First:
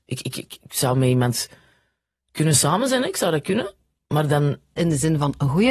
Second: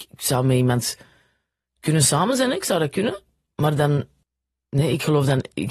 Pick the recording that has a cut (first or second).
first